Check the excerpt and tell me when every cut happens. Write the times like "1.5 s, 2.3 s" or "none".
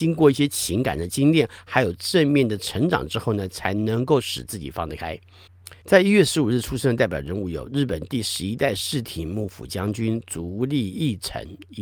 5.8 s